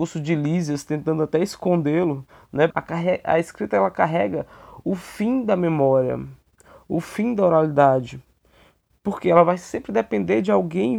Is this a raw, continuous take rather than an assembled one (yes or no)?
no